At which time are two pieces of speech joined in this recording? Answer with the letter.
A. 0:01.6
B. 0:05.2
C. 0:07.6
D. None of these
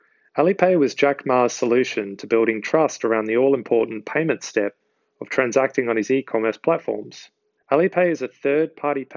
C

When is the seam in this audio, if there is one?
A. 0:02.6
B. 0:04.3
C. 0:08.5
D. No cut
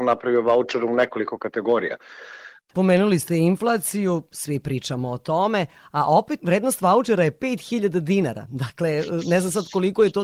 A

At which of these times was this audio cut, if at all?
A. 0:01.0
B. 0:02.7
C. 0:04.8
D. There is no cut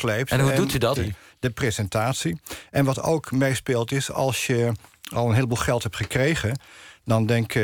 A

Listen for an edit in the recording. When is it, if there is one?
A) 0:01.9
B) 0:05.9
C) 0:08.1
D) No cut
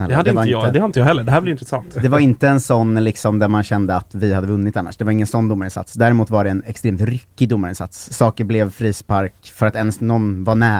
D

